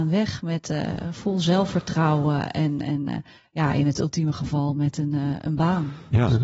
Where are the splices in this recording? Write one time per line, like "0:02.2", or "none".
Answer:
none